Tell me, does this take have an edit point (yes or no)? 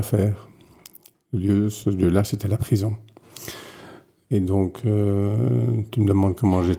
yes